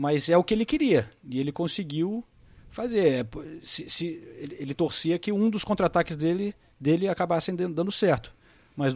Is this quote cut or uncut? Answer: uncut